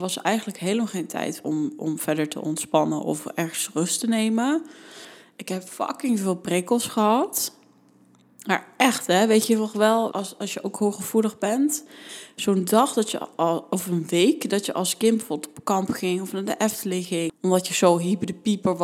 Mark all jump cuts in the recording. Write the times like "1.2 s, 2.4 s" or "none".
10.1 s, 17.3 s

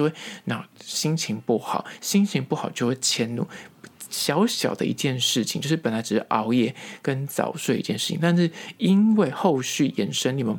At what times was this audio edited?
none

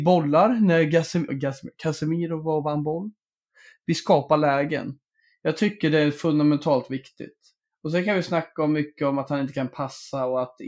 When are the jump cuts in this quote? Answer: 1.3 s

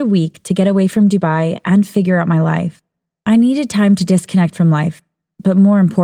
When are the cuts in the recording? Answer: none

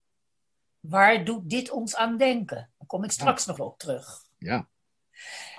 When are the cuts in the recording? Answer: 3.6 s

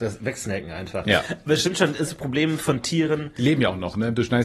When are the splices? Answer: 2.1 s

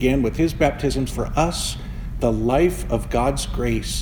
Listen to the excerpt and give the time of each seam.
1.1 s

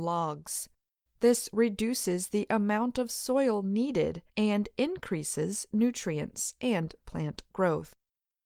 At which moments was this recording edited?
1.1 s, 4.3 s

